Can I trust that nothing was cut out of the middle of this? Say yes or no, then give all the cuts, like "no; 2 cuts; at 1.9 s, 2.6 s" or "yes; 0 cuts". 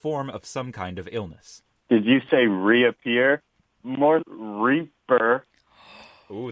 no; 1 cut; at 4.2 s